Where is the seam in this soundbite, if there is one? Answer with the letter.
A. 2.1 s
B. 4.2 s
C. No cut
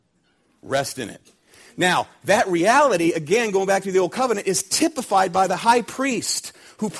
C